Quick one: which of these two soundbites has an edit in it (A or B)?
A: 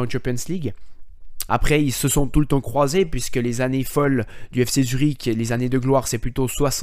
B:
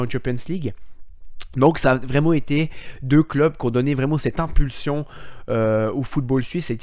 A